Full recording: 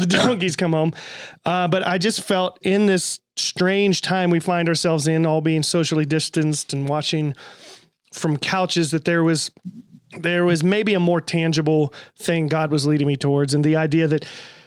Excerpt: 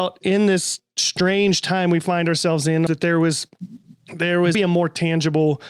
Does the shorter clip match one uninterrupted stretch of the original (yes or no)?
no